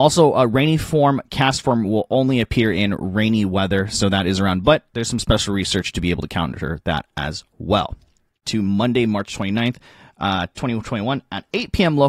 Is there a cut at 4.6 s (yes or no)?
no